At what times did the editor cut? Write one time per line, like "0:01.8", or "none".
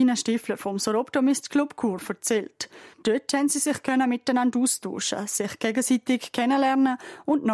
0:02.9